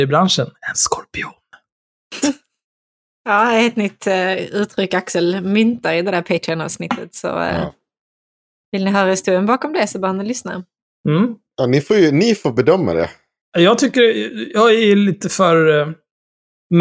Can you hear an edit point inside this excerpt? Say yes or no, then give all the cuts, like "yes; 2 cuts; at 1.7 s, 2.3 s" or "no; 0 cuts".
no; 0 cuts